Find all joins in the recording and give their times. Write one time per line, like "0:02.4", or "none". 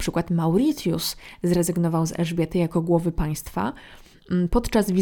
none